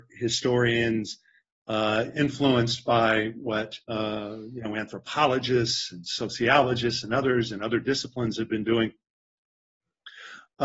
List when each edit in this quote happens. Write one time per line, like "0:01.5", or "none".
0:02.1
0:03.8